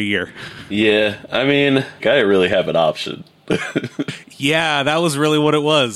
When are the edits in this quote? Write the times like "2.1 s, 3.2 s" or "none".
2.0 s